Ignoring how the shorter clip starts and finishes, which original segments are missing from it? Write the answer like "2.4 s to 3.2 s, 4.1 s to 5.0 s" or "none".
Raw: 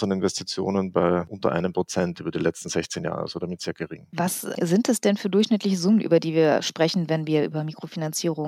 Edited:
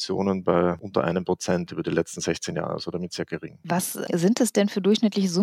none